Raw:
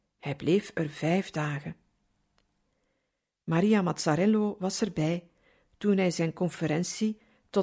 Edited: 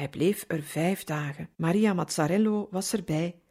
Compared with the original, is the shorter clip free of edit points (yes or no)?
no